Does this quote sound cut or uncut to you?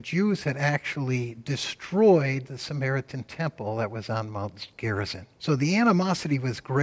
cut